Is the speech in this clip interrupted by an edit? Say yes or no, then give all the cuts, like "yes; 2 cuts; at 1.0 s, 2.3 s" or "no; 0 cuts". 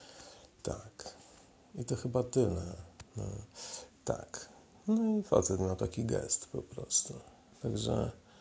yes; 1 cut; at 3.9 s